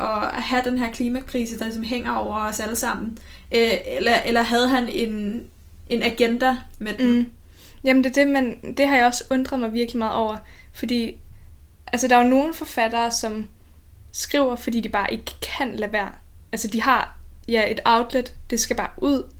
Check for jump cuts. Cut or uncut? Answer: uncut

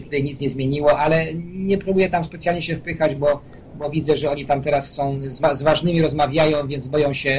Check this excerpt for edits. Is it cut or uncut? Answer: uncut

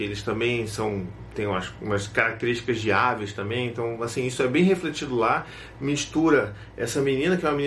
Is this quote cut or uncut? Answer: uncut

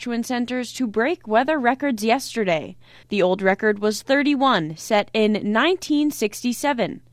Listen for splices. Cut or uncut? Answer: cut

